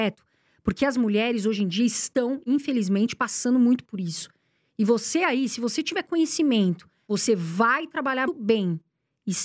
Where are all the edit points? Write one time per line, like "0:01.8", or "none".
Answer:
0:07.0
0:08.2